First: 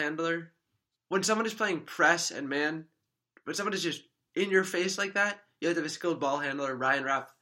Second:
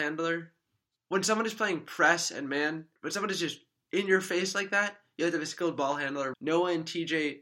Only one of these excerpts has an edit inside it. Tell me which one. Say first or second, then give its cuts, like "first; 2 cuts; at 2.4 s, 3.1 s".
second; 2 cuts; at 3.0 s, 6.3 s